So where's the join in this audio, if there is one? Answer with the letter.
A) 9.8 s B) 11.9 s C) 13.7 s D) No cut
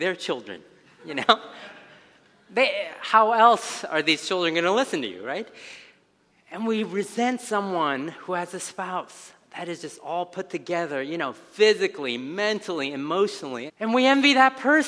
C